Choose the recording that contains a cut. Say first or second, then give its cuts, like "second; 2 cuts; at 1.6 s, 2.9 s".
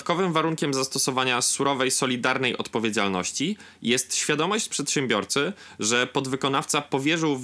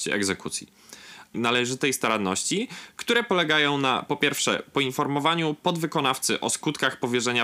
second; 1 cut; at 1.3 s